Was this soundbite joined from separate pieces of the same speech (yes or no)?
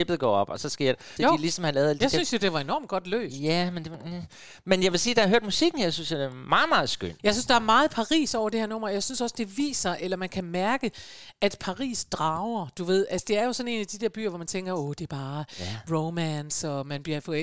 yes